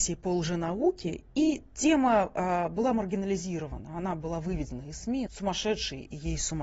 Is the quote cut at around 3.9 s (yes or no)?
no